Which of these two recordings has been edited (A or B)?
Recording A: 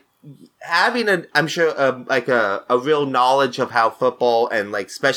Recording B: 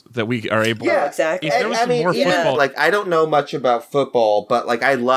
B